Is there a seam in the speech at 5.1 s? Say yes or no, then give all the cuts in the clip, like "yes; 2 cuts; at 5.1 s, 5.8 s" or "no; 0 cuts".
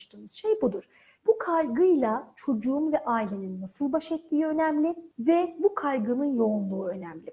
yes; 2 cuts; at 1.2 s, 5.1 s